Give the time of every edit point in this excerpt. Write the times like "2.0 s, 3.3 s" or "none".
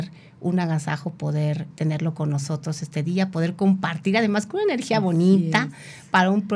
1.7 s